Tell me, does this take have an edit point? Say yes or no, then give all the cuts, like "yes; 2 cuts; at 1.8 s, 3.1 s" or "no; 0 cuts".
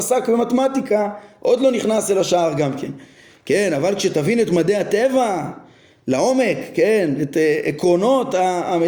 no; 0 cuts